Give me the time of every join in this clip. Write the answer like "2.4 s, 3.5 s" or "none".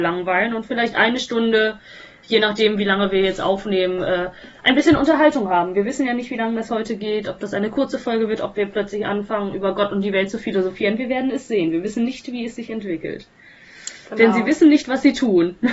8.4 s